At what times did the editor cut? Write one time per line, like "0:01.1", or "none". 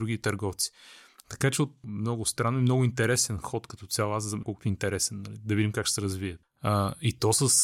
0:01.8
0:04.4
0:06.4